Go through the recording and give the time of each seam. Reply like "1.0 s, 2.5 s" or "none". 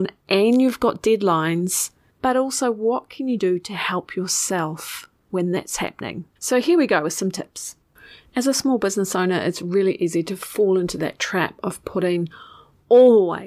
2.1 s